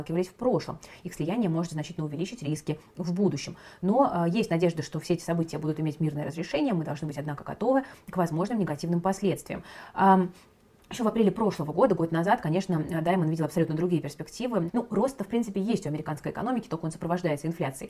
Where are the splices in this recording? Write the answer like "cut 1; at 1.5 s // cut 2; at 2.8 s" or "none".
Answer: cut 1; at 14.7 s